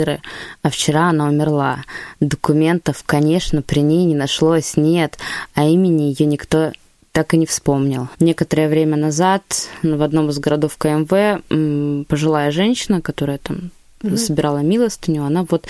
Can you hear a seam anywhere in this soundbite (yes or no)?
yes